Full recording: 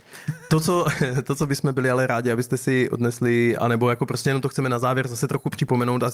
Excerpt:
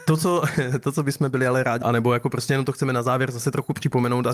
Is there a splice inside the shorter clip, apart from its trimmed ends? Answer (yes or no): yes